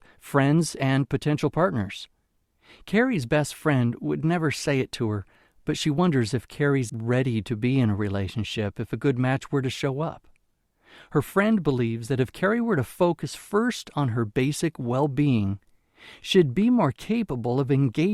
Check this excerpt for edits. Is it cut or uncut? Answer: cut